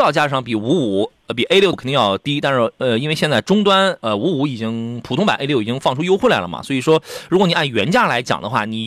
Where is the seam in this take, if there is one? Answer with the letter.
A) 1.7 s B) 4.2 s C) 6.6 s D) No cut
A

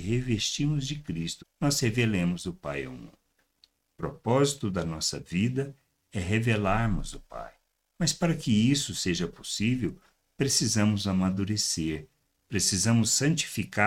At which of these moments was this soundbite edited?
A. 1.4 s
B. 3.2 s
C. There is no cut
A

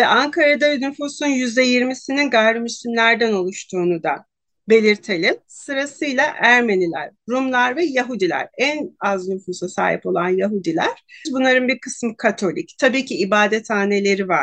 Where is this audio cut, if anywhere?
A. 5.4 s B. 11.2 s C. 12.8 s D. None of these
B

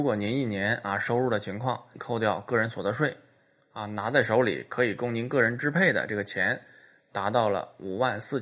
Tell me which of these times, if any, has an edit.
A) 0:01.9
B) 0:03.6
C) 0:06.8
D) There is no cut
A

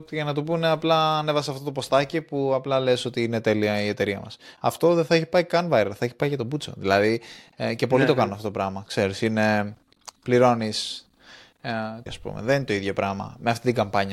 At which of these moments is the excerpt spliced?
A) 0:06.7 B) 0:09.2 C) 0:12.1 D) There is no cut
C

